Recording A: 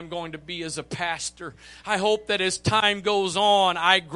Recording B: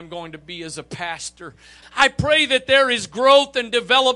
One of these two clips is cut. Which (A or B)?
B